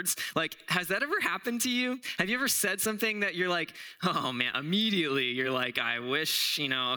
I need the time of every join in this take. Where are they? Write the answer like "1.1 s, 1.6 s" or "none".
none